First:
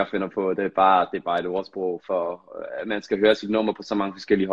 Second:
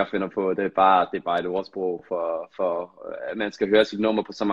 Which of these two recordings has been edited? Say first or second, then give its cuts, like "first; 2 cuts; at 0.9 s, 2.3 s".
first; 1 cut; at 2.0 s